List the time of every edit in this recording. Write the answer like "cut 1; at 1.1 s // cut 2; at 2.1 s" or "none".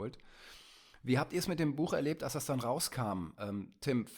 none